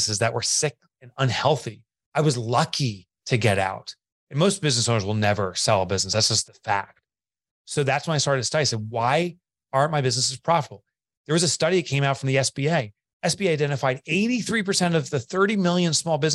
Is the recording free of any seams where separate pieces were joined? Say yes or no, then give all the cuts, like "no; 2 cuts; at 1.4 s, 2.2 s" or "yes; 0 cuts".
no; 1 cut; at 6.4 s